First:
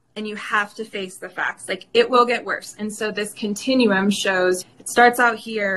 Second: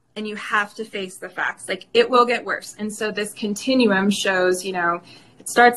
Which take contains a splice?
first; 1 cut; at 4.6 s

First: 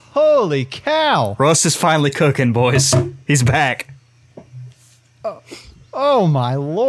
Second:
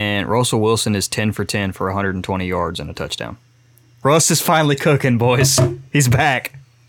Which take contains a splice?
second; 1 cut; at 4.0 s

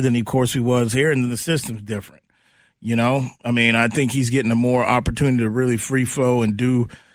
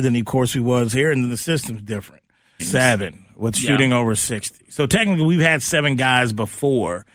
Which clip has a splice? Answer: second; 1 cut; at 2.6 s

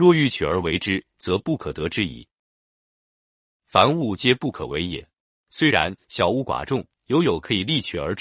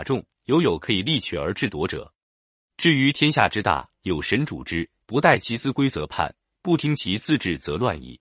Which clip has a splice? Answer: first; 1 cut; at 5.3 s

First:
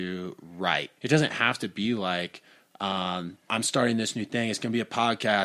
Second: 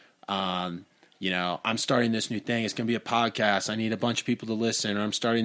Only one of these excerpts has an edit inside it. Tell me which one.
first; 2 cuts; at 1.0 s, 3.5 s

